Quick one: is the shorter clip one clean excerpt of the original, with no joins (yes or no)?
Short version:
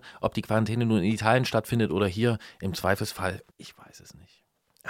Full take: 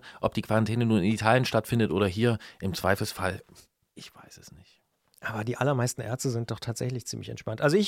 no